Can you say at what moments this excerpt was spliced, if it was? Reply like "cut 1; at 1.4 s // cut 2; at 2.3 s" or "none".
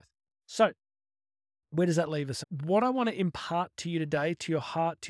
cut 1; at 2.4 s